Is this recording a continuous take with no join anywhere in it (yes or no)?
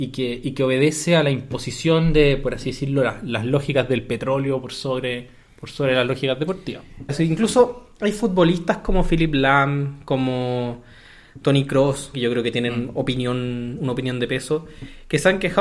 no